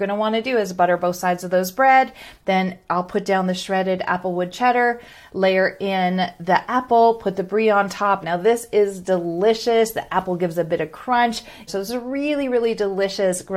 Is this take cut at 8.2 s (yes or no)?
yes